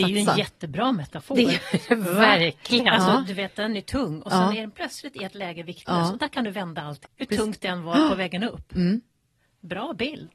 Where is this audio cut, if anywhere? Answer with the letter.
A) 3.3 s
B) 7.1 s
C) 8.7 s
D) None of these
B